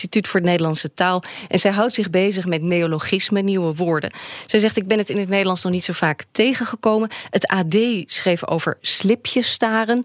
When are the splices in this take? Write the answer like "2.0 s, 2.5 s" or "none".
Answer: none

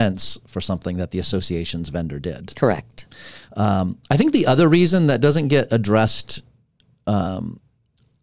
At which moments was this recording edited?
3.5 s

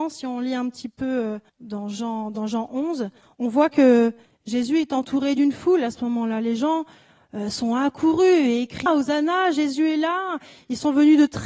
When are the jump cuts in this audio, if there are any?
1.5 s, 8.9 s

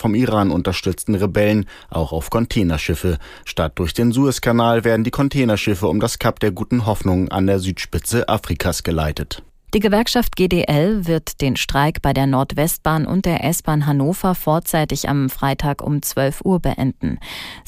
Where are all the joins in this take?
3.4 s, 9.7 s

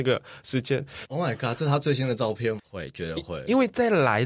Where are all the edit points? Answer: 1.0 s, 2.6 s

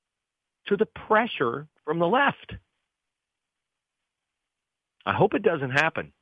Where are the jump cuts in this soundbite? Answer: none

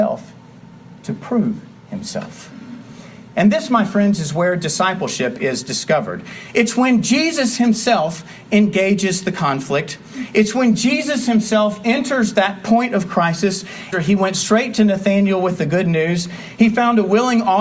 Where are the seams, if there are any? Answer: 13.9 s

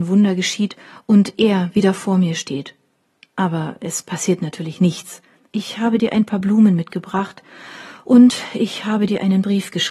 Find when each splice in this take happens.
5.4 s

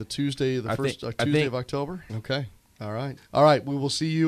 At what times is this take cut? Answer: 2.1 s, 3.2 s

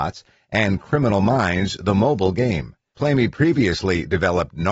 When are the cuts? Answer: 2.9 s

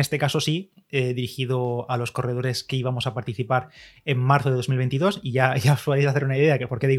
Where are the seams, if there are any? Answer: none

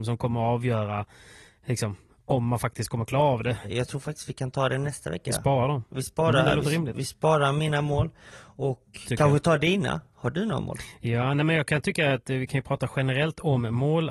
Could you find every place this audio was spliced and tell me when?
3.6 s

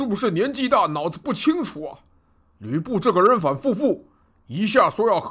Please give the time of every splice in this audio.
3.4 s

